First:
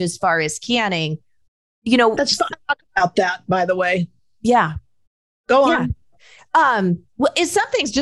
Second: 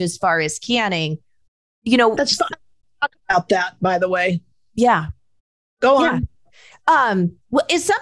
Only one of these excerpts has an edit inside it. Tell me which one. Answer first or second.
first